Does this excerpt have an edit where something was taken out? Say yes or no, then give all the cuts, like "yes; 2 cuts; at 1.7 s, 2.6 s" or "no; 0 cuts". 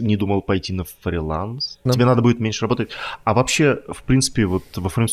yes; 1 cut; at 1.9 s